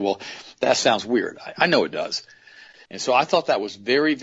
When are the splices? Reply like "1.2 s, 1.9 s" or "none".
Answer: 2.8 s